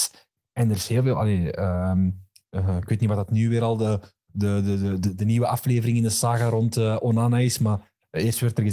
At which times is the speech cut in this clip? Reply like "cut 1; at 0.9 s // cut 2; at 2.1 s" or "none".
none